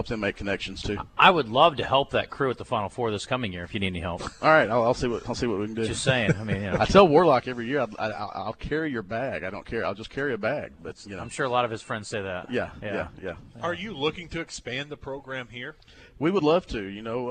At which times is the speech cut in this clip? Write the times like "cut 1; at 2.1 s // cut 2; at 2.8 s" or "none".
none

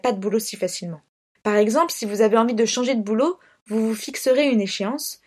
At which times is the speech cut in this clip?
cut 1; at 1.3 s

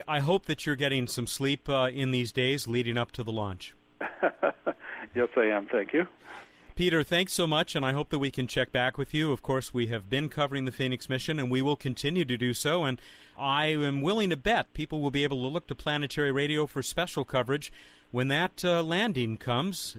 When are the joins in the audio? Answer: none

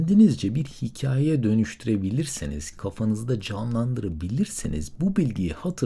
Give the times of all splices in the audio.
cut 1; at 2.7 s

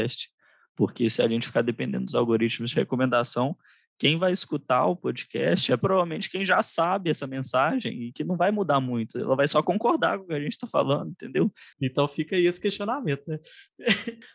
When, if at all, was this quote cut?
cut 1; at 5.8 s // cut 2; at 11.7 s

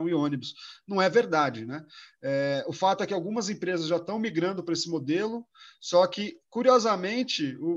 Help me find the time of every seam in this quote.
none

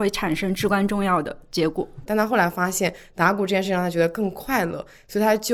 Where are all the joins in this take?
cut 1; at 2.1 s

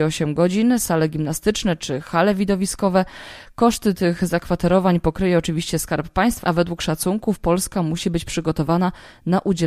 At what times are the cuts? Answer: cut 1; at 6.4 s

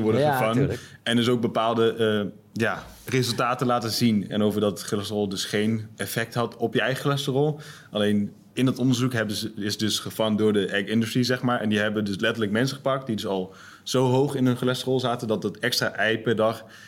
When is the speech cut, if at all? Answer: cut 1; at 4.3 s

